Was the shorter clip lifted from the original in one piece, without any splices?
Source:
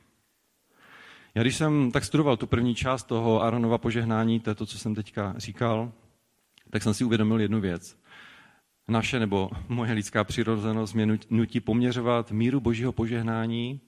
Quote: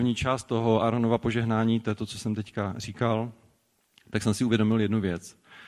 yes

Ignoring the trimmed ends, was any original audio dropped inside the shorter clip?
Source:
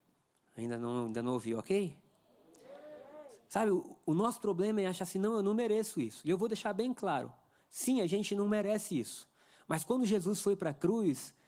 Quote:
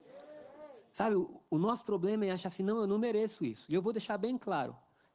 no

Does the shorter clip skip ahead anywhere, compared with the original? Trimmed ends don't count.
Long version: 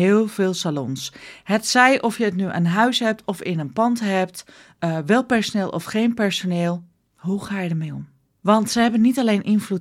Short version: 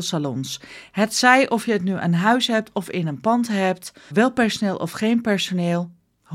yes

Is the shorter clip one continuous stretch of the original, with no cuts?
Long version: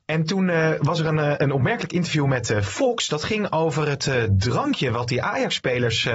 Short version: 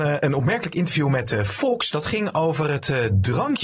yes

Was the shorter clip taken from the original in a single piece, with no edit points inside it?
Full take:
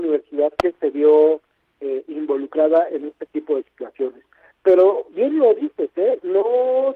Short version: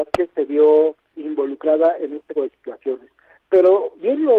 no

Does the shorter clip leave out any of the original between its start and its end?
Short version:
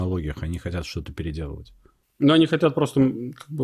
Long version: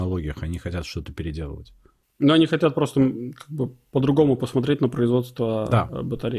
no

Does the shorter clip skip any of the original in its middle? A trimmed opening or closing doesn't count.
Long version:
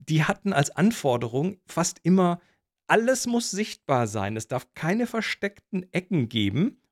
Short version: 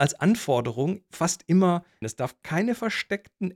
yes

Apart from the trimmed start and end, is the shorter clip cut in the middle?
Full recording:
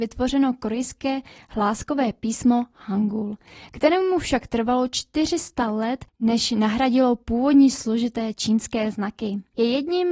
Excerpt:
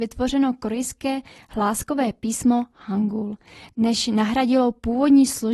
yes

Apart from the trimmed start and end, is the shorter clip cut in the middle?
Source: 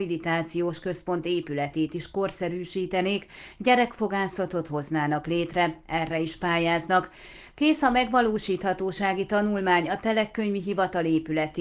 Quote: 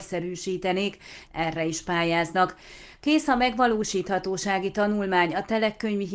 yes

